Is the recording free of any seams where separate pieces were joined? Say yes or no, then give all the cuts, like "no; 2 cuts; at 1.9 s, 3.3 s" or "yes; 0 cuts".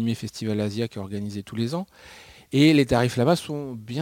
yes; 0 cuts